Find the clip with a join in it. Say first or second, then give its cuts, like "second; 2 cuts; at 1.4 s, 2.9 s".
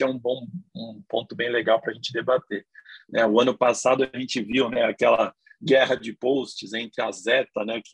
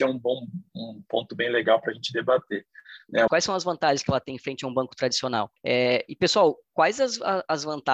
second; 2 cuts; at 3.3 s, 5.6 s